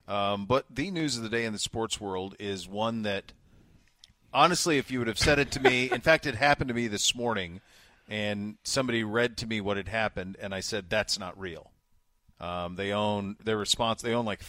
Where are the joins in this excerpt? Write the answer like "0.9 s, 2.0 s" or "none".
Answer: 12.3 s, 13.4 s